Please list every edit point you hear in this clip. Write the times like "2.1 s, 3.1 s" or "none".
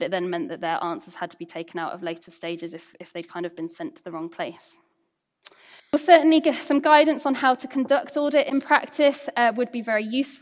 5.8 s